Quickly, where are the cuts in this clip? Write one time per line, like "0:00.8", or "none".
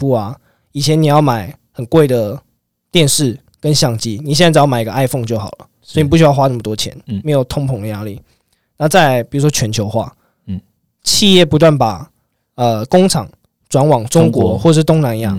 none